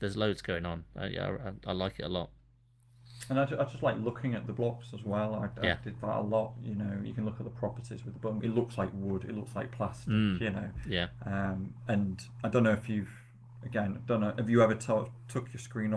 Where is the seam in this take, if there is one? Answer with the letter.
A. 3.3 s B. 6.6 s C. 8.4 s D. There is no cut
C